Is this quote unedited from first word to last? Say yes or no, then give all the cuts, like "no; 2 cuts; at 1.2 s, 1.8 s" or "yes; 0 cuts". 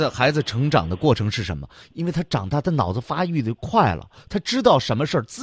no; 1 cut; at 1.8 s